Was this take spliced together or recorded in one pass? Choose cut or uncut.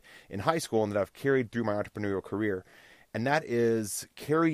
uncut